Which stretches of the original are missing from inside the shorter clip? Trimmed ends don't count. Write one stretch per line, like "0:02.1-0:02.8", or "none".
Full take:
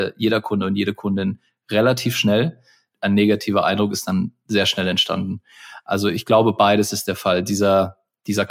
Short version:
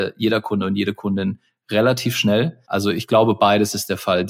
0:02.6-0:05.8